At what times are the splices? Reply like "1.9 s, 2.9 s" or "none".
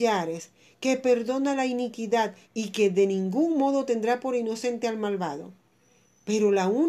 2.4 s